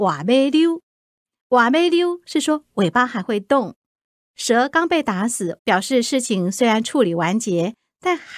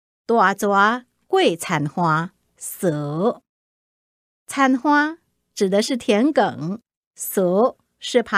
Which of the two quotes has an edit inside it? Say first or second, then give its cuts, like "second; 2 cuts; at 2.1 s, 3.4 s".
first; 1 cut; at 5.6 s